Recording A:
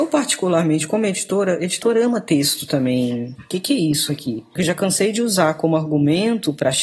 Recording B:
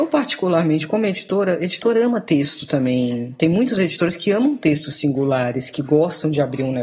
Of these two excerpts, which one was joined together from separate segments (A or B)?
A